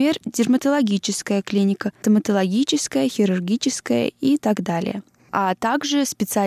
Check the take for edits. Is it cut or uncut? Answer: cut